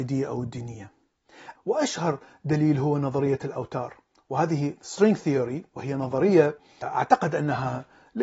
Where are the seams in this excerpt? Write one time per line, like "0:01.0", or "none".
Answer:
0:01.6

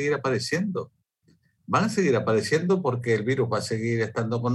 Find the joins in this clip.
none

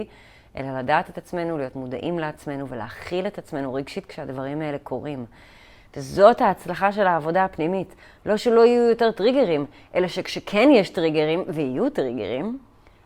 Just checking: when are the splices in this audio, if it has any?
none

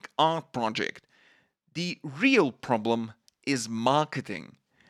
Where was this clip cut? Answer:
none

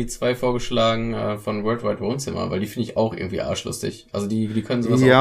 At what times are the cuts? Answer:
none

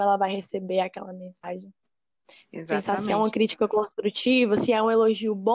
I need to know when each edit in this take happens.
none

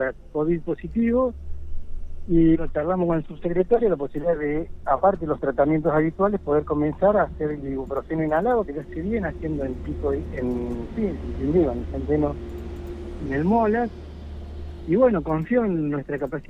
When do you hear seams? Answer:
0:02.5
0:13.3

